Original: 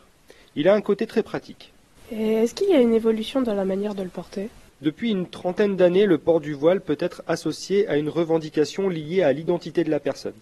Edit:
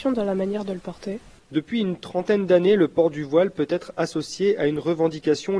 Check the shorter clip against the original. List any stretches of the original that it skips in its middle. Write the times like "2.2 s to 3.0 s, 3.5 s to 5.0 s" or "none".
none